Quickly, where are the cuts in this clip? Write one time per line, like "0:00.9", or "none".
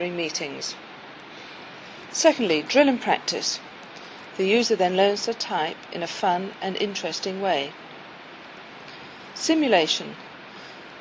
0:04.3